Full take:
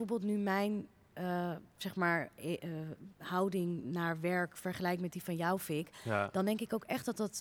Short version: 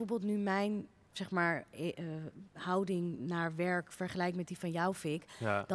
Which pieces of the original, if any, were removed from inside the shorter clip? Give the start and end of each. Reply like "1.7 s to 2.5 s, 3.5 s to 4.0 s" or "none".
1.1 s to 1.7 s